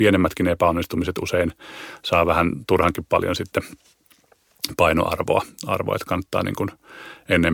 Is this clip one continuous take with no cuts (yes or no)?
yes